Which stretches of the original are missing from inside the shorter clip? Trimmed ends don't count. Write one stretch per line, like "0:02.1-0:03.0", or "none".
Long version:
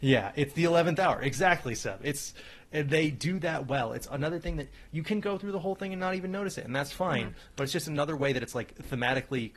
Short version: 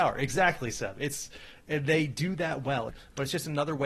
0:03.9-0:07.3